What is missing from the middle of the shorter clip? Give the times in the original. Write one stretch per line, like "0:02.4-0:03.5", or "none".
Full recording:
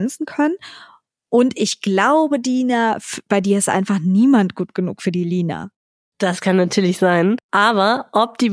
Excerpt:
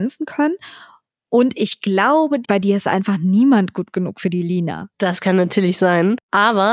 0:02.4-0:03.2
0:05.7-0:06.1